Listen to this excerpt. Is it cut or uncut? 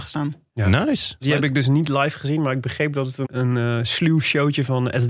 cut